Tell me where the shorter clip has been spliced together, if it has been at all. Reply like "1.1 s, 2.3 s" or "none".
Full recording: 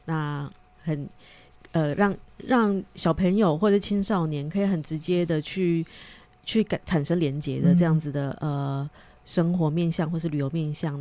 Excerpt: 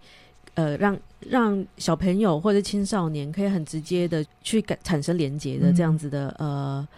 4.3 s

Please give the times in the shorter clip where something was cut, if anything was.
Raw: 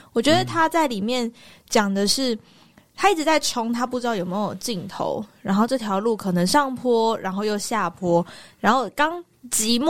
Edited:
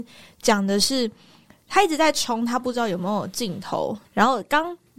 4.1 s

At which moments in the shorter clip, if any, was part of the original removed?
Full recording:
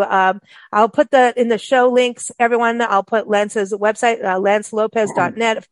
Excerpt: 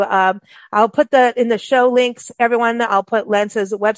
none

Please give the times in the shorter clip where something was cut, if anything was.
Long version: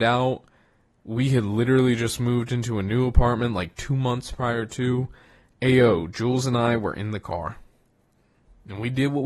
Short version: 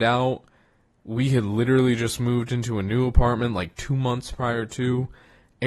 none

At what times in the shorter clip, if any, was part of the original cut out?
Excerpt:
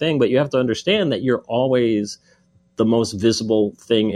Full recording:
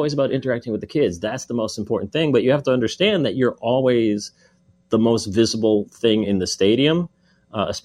none

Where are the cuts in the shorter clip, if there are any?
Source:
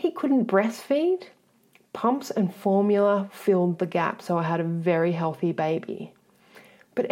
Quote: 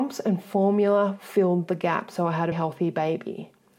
2.5 s

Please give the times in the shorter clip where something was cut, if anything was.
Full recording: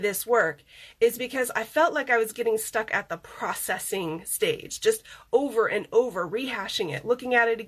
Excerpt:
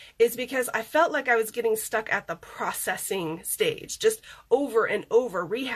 none

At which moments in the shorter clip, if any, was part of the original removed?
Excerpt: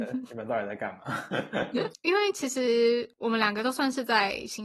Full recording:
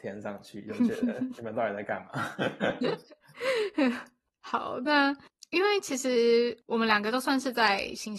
1.9 s

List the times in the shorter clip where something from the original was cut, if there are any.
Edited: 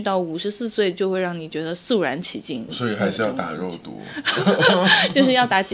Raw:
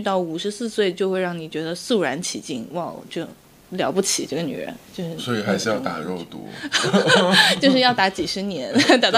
2.7 s

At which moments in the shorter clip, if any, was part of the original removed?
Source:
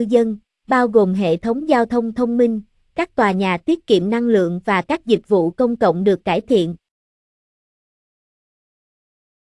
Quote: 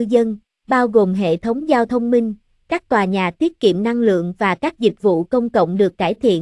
1.9 s

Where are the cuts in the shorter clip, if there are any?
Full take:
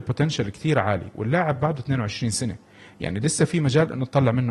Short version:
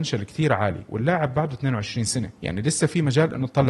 2.4 s

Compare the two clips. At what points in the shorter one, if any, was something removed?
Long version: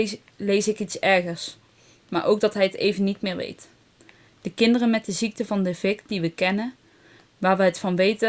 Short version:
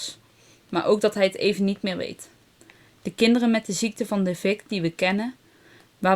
none

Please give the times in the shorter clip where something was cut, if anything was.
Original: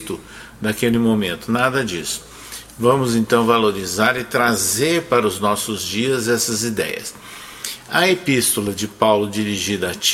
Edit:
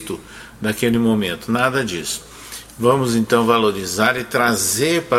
none

